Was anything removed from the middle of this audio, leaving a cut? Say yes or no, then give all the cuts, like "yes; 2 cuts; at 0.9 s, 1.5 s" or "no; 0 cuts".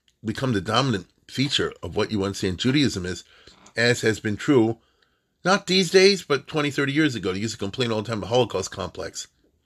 no; 0 cuts